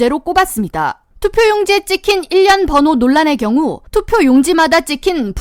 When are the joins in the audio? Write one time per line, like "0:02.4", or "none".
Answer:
0:01.1
0:03.9